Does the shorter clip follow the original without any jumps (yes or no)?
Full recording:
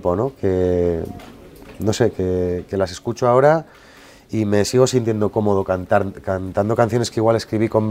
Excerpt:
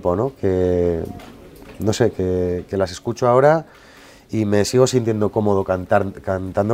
yes